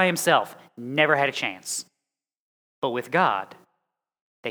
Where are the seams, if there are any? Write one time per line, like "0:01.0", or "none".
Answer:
none